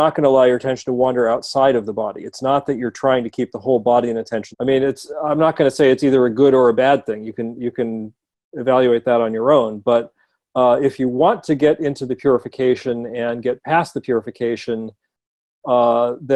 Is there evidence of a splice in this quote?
yes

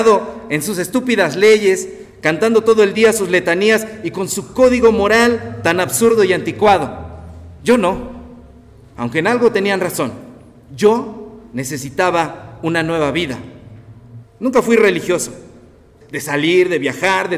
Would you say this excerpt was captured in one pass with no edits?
no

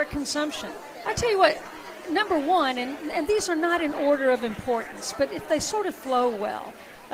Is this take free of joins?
no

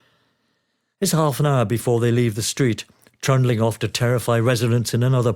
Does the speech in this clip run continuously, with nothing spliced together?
yes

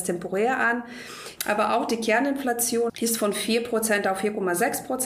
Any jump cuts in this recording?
yes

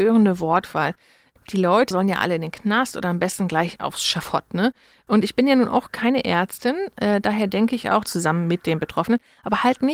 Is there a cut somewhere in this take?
yes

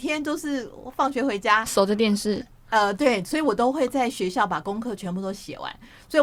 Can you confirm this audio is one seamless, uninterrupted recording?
yes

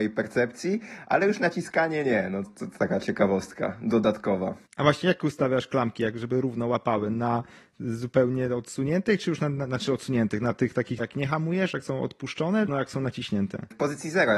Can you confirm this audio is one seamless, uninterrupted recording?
no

